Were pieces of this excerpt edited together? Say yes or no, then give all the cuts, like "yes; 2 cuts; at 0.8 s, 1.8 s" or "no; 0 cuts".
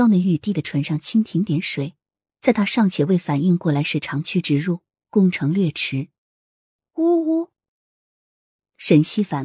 no; 0 cuts